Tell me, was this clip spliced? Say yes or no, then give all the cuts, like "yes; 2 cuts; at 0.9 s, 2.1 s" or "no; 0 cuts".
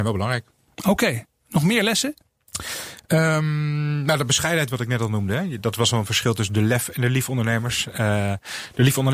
no; 0 cuts